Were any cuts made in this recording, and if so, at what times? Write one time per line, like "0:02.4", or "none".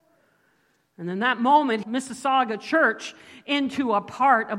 0:01.8